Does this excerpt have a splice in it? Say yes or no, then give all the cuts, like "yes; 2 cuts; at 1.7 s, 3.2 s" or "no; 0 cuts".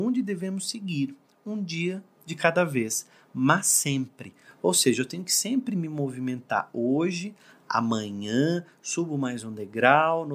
no; 0 cuts